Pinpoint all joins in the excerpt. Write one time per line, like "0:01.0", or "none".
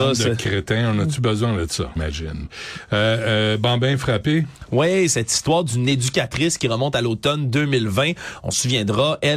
0:02.0